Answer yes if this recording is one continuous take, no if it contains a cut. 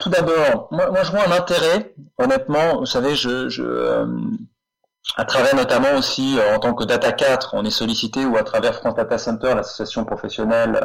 yes